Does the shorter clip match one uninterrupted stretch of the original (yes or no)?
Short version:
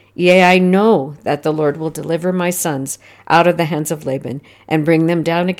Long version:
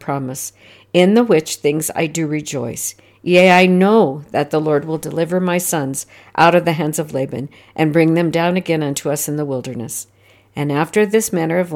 yes